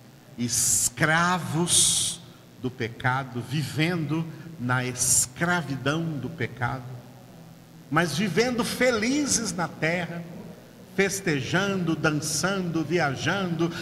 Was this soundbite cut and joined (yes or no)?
yes